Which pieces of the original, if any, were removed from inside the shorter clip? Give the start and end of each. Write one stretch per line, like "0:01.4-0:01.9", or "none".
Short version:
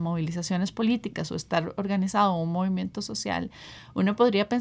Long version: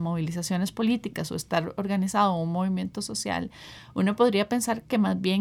none